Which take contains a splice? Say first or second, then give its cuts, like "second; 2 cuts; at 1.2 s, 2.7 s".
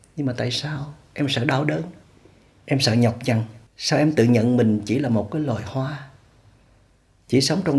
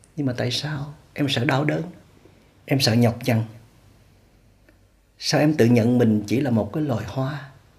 first; 1 cut; at 3.7 s